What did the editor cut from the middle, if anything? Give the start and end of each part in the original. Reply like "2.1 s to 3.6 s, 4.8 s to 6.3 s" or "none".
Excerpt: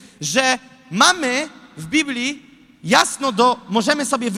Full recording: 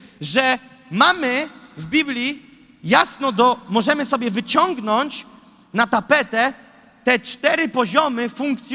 none